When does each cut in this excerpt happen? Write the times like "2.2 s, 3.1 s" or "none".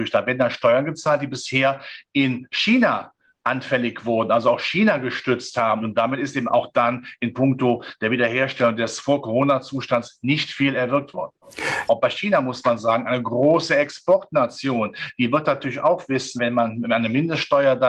5.8 s, 11.9 s, 16.4 s